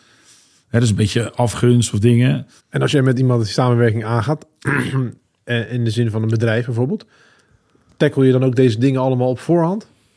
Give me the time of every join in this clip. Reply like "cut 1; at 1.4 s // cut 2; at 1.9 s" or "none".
cut 1; at 2.6 s